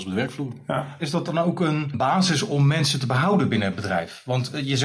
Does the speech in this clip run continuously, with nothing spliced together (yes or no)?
no